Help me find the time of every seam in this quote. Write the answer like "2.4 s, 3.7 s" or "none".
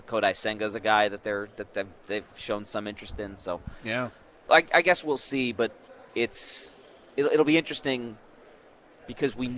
4.5 s